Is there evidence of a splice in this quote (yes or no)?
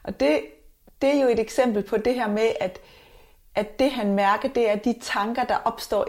no